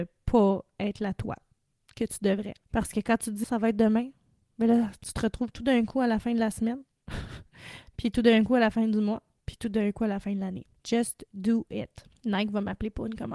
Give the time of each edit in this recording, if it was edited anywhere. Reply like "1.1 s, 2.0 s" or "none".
3.4 s